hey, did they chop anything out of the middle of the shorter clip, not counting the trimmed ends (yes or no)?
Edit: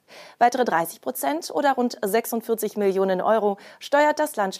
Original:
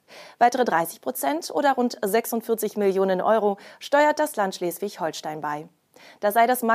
no